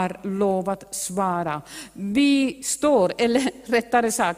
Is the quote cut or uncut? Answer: uncut